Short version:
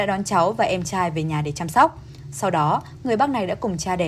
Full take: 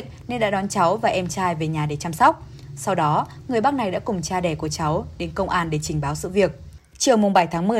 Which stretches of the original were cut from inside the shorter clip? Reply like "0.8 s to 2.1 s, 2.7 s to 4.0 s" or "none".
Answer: none